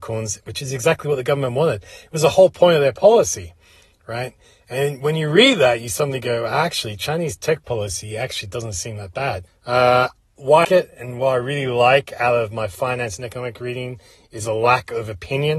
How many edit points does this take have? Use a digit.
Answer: 2